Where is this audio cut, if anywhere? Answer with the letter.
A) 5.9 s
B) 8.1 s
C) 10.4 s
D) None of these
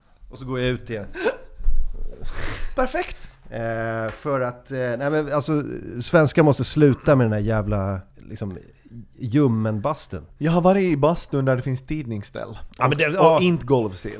B